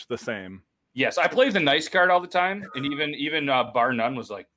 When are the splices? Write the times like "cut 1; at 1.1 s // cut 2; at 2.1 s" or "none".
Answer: none